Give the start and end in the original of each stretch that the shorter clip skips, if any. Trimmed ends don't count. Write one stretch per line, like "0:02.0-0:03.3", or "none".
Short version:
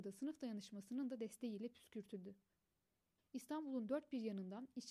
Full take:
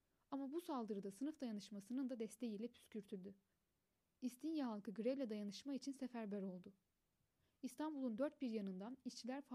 0:04.2-0:07.5